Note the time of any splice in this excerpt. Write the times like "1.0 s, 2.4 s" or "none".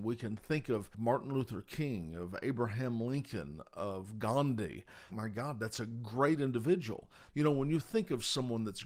5.1 s, 7.3 s

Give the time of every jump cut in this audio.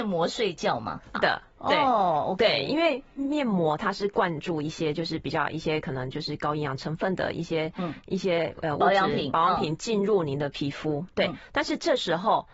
1.1 s

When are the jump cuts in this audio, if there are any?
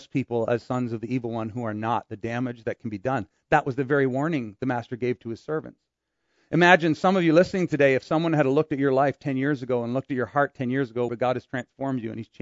11.1 s

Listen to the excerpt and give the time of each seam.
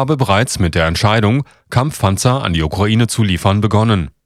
none

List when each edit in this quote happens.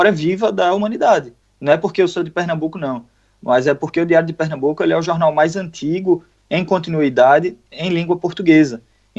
1.4 s

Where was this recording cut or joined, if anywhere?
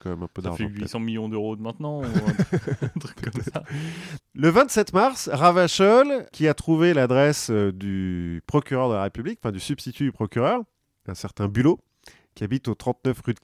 4.2 s

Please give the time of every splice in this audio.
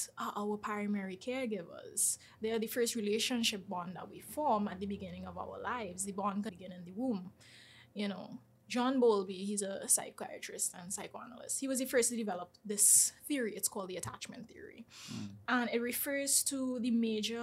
6.5 s

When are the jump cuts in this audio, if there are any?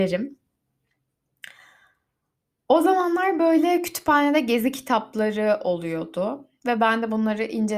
none

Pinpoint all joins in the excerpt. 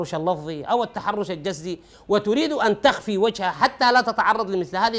none

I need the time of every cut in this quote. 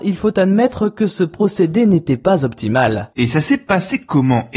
3.1 s

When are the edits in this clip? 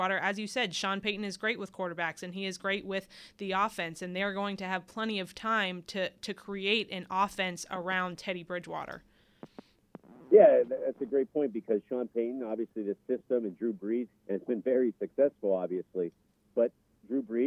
14.1 s

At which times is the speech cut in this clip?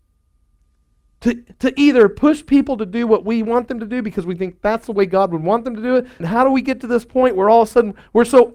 6.2 s

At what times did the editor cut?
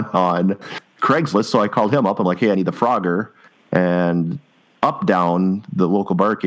none

